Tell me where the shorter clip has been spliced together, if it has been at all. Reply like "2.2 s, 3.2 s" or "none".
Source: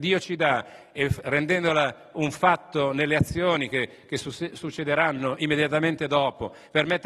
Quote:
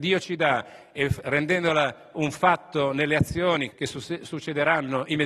3.7 s

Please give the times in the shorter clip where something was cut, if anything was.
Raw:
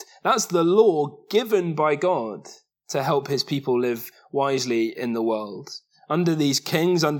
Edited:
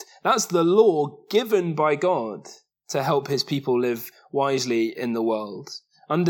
none

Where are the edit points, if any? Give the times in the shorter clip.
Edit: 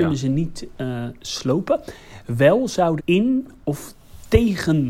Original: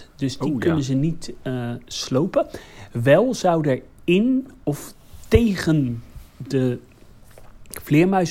3.0 s

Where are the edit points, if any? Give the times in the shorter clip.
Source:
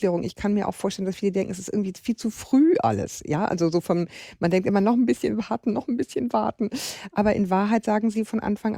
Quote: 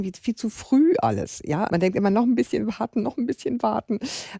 1.7 s

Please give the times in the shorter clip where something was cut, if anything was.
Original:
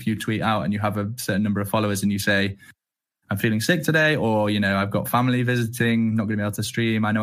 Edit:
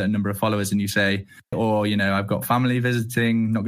1.5 s

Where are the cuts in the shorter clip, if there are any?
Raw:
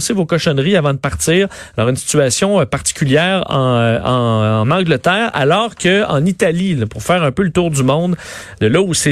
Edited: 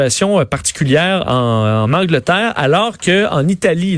1.2 s

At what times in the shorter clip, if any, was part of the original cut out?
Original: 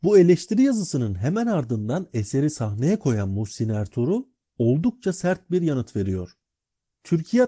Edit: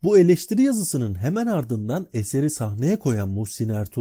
none

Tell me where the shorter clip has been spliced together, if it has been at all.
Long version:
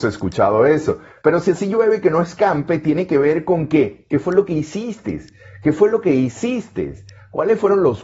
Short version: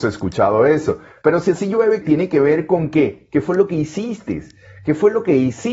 2.0 s

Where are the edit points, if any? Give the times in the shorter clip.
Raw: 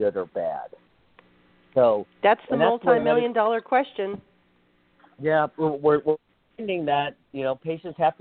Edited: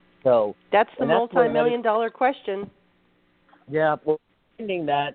4.0 s

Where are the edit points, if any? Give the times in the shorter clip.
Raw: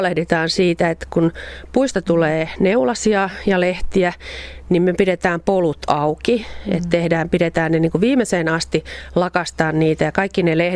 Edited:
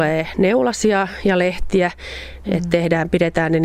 2.4 s

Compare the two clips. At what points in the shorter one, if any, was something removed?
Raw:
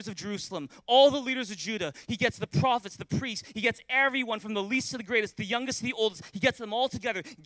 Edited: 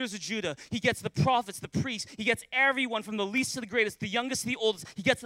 none

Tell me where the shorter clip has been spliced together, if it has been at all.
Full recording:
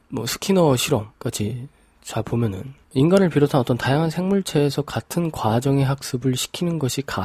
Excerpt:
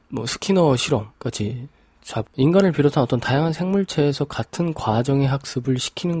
2.2 s

